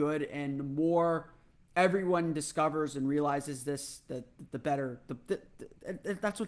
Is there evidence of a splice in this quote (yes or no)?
no